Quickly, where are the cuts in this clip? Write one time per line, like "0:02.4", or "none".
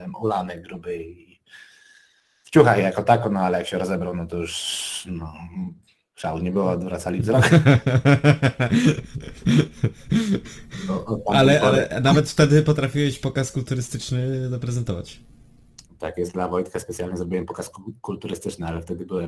none